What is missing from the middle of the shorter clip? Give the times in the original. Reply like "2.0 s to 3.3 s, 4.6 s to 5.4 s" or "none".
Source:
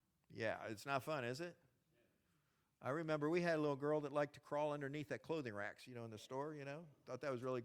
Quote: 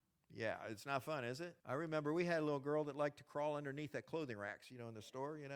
1.6 s to 2.8 s